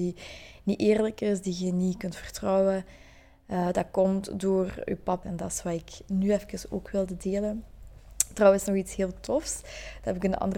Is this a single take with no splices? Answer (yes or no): no